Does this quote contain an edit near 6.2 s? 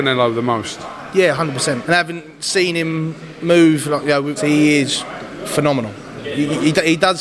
no; 2 cuts; at 1.8 s, 4.4 s

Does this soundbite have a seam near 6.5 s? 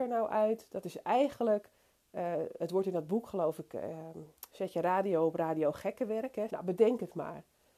yes; 1 cut; at 6.5 s

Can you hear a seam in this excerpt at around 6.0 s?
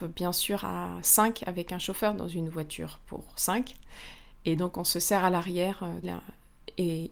yes; 1 cut; at 6.0 s

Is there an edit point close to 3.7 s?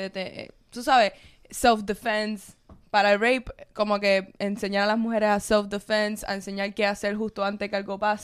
no; 0 cuts

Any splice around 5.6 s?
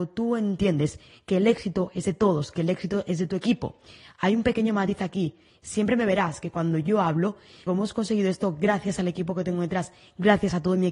no; 1 cut; at 7.7 s

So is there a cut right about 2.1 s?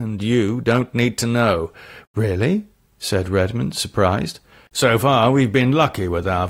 yes; 2 cuts; at 2.1 s, 4.7 s

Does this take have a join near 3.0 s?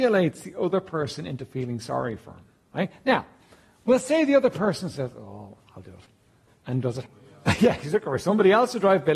no; 1 cut; at 7.0 s

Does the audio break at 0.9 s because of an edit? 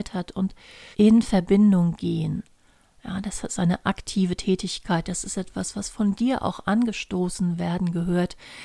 yes; 1 cut; at 0.9 s

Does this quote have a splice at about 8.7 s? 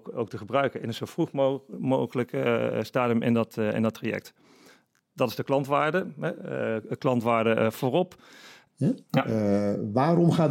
yes; 1 cut; at 8.7 s

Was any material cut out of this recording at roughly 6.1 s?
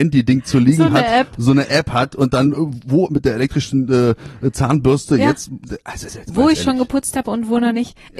yes; 1 cut; at 6.1 s

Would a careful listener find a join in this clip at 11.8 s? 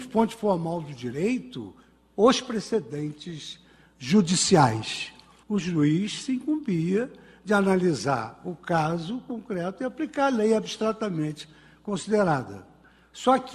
no; 1 cut; at 5.4 s

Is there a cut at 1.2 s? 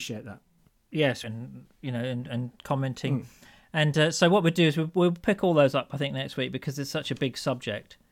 yes; 1 cut; at 1.2 s

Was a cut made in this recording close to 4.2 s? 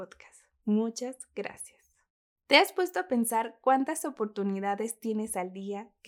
no; 1 cut; at 2.3 s

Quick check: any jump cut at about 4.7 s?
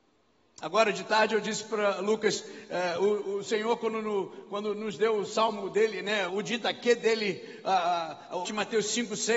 no; 2 cuts; at 6.3 s, 8.4 s

